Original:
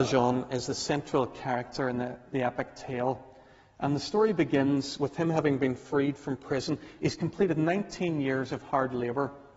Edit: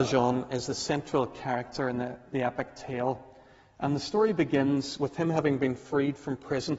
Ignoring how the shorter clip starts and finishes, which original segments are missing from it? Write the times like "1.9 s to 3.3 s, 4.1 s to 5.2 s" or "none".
none